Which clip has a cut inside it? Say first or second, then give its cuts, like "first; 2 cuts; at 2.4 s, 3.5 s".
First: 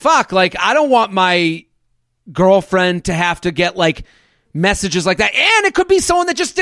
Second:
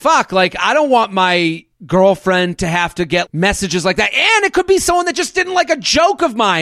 second; 2 cuts; at 1.7 s, 3.3 s